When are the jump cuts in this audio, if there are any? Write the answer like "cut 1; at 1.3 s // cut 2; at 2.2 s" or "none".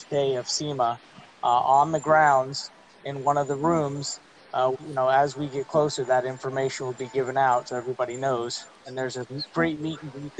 cut 1; at 4.7 s